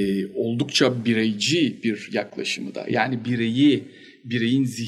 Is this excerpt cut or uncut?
uncut